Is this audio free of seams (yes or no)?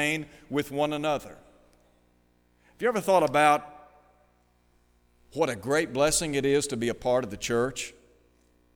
yes